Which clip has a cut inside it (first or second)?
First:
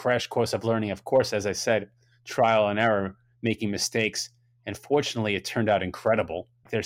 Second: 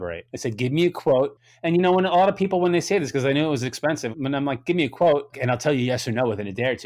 second